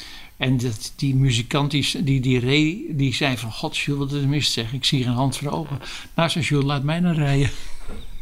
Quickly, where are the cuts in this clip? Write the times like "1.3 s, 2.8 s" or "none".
none